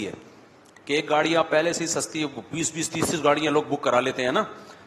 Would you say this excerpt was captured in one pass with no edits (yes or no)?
yes